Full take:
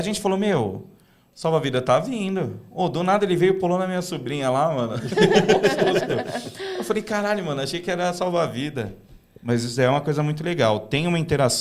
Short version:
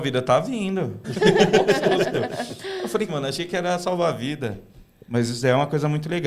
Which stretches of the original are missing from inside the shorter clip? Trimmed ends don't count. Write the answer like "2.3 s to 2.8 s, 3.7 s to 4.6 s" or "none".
2.6 s to 5.0 s, 7.0 s to 7.4 s